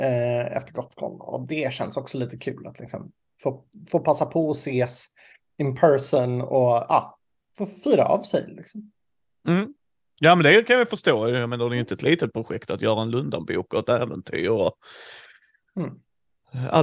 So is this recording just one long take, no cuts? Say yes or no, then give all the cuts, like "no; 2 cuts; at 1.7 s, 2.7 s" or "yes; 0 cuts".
yes; 0 cuts